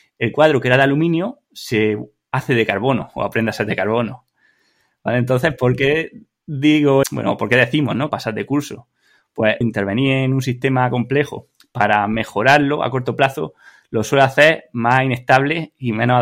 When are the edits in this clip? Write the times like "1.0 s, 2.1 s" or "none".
7.0 s, 8.1 s, 9.6 s